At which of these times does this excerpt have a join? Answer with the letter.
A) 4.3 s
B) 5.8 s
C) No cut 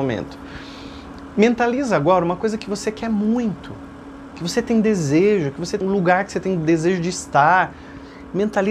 B